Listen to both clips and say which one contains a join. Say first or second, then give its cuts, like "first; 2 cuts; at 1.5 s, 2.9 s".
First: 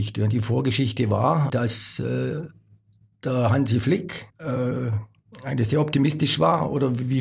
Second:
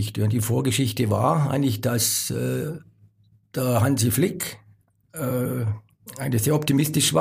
first; 2 cuts; at 1.5 s, 4.3 s